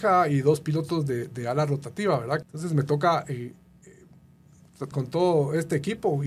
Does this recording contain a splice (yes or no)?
yes